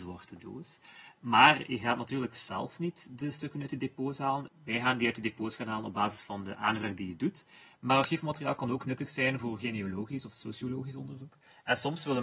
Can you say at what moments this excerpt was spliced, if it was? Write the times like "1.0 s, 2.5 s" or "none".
4.5 s, 7.7 s